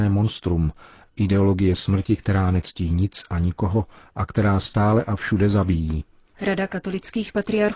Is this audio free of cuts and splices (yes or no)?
no